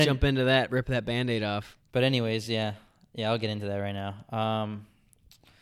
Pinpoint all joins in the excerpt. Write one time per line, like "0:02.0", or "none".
none